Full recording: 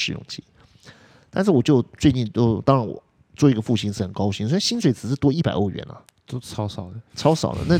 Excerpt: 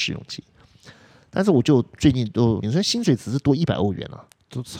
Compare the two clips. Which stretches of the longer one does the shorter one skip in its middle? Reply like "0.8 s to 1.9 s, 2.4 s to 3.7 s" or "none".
2.6 s to 4.4 s